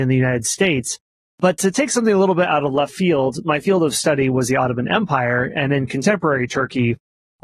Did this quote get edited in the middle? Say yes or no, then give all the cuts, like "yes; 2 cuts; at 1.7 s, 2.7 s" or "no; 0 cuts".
no; 0 cuts